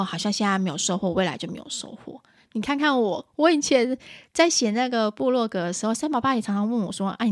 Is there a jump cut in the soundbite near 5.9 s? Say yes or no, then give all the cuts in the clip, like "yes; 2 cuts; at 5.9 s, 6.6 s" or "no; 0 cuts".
no; 0 cuts